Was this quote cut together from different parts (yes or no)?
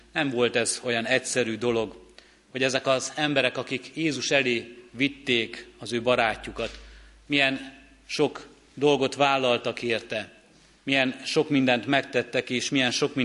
no